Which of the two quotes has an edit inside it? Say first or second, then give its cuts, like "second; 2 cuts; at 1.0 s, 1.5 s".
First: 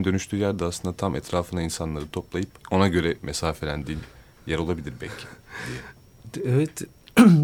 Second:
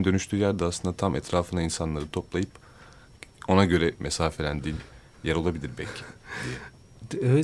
first; 1 cut; at 2.6 s